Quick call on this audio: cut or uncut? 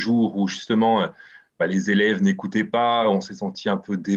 uncut